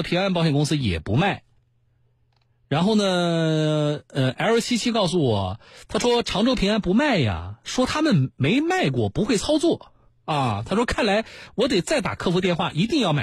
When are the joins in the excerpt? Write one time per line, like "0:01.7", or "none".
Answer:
none